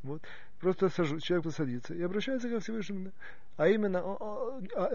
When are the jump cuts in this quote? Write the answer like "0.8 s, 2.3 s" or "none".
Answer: 1.4 s